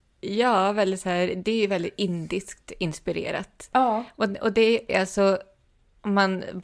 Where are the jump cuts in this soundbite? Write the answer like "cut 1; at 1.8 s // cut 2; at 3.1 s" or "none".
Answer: cut 1; at 4.9 s